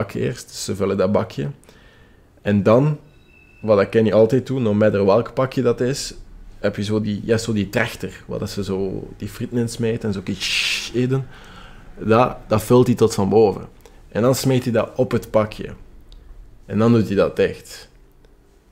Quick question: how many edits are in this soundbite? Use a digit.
1